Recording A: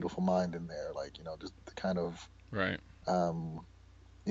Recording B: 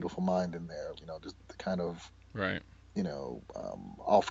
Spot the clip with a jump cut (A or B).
B